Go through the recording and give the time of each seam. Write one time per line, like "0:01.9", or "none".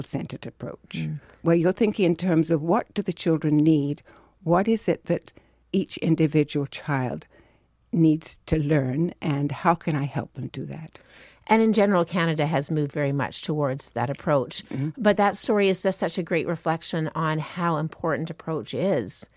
none